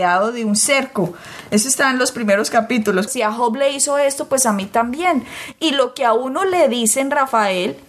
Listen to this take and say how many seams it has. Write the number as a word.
one